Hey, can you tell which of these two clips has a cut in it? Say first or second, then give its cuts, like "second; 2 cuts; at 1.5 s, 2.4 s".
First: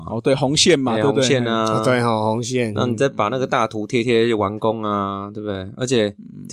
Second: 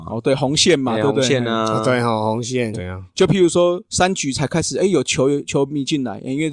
second; 1 cut; at 2.7 s